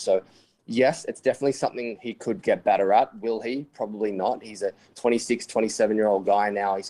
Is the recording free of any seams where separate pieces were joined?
yes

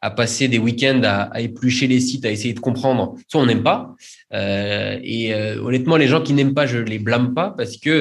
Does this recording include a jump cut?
no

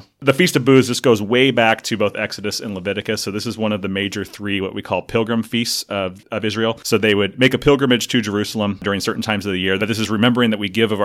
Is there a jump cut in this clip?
yes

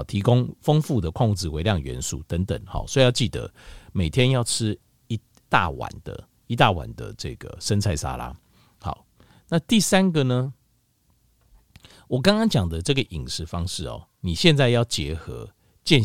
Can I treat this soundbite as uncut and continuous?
yes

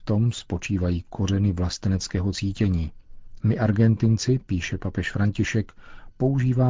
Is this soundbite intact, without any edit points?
no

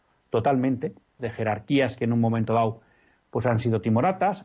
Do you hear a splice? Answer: yes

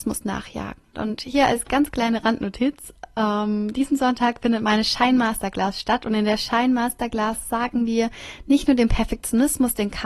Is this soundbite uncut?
no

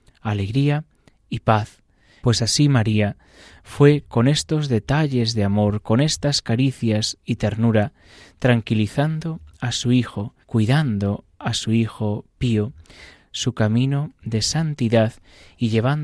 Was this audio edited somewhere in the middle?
yes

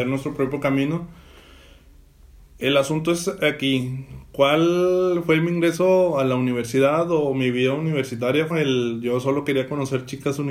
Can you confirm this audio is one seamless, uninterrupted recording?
no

